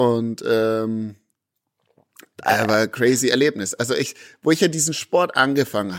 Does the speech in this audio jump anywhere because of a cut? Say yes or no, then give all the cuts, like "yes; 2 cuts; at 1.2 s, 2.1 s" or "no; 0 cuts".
no; 0 cuts